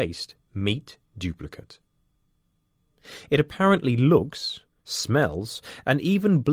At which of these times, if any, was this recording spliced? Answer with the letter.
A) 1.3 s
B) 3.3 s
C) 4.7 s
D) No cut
D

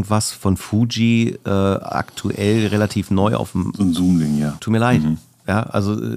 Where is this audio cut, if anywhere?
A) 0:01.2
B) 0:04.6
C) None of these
B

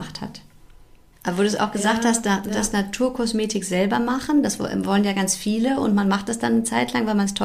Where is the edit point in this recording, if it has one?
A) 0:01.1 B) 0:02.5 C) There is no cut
A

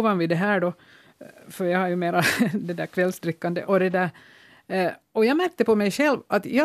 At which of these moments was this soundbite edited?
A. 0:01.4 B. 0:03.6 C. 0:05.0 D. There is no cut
B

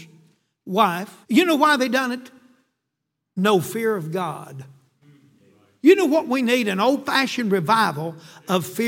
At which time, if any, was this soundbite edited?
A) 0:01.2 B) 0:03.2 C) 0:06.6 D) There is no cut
A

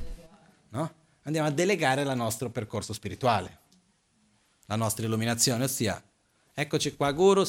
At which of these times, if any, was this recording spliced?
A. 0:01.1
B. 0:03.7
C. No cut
C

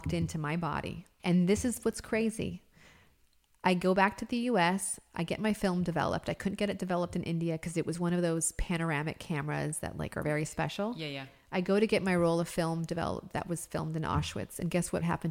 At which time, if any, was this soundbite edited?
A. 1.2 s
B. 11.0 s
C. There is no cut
A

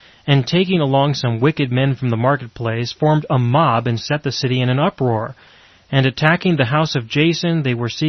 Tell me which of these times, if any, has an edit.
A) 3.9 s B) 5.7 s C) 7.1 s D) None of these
D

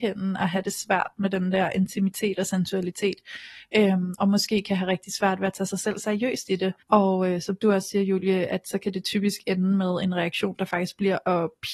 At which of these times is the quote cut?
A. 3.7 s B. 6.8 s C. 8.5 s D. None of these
B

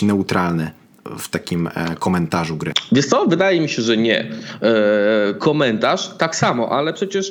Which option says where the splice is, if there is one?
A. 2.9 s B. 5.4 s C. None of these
B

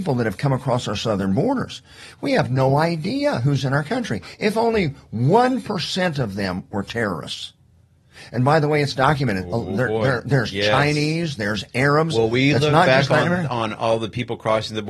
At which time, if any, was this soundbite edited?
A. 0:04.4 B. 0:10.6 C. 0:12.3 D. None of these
D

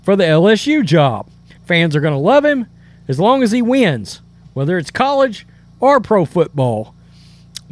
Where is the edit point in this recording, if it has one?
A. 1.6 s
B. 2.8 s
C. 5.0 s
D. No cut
A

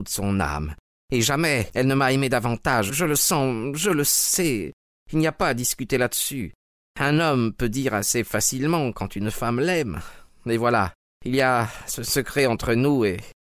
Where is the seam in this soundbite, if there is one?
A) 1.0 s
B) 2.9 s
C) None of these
B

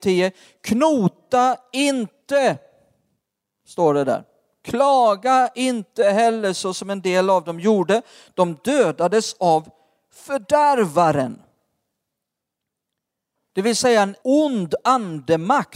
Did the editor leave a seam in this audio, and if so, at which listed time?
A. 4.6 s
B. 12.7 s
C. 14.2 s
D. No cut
C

